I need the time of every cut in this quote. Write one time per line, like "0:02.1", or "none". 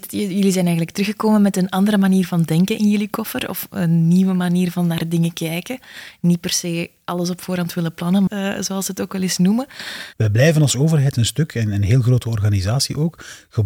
0:08.3
0:10.1